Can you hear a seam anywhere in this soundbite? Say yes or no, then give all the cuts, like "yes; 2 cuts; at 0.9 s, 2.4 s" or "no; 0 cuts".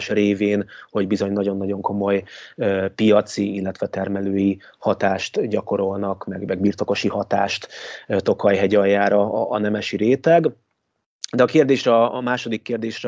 no; 0 cuts